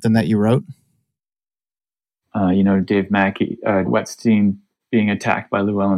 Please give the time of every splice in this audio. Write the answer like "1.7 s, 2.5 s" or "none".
2.2 s, 3.9 s